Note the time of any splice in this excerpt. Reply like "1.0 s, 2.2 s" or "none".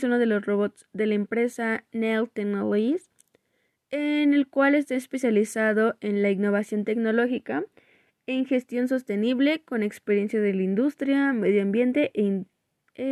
none